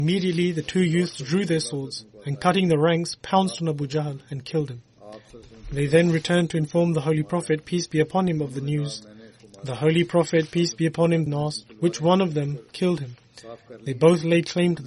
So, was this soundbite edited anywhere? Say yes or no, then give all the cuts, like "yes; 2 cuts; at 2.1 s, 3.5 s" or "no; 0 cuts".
yes; 1 cut; at 11.3 s